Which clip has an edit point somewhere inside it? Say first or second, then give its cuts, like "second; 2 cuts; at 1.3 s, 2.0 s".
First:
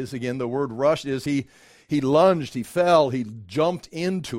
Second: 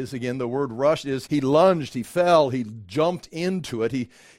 second; 1 cut; at 1.3 s